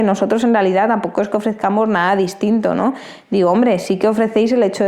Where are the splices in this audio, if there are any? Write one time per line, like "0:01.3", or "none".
none